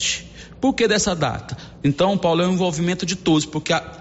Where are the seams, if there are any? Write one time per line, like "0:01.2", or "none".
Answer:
0:01.8